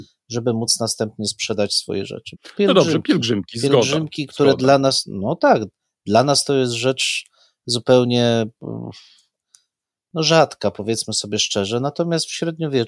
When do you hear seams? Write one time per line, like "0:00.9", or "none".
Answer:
0:02.3